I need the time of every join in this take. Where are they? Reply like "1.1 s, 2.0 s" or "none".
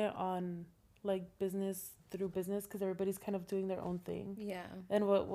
none